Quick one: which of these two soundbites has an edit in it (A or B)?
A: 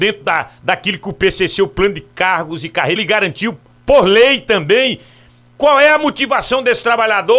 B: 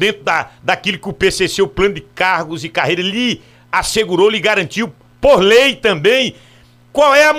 A